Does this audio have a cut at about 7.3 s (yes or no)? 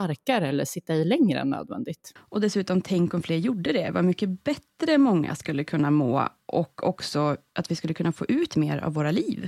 no